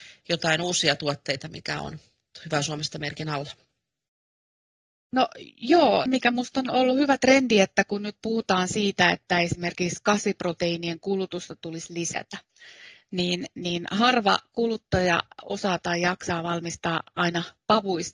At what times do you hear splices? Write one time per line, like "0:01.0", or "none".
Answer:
0:06.1